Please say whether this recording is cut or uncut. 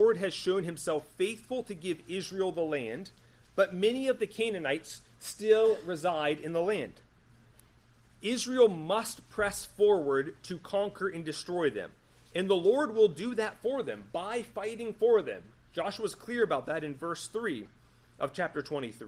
uncut